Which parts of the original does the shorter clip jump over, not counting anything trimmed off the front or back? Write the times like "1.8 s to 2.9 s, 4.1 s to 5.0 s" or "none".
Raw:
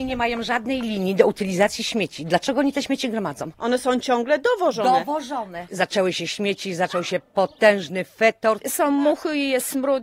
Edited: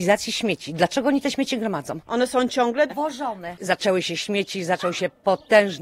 4.4 s to 5.0 s